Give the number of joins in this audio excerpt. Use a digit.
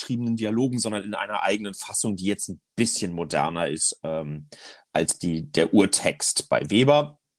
0